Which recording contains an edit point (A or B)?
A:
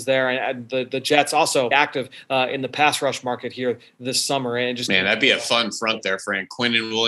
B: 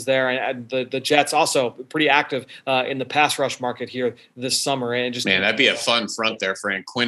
A